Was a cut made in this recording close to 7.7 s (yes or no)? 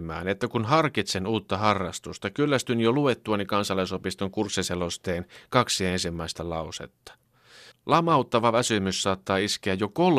yes